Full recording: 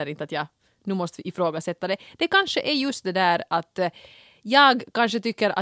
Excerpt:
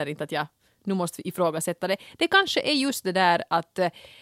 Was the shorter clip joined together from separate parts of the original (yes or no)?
no